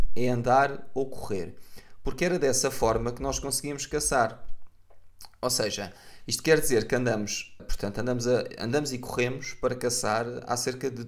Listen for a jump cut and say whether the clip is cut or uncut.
cut